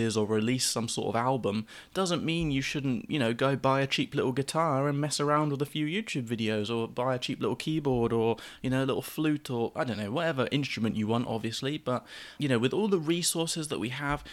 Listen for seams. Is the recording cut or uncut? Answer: cut